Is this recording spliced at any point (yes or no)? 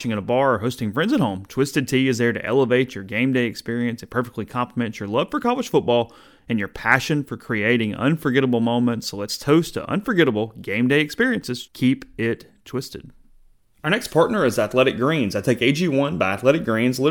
yes